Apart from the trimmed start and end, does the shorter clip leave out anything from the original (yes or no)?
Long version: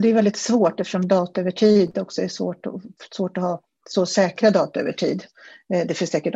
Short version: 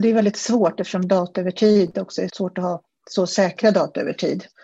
yes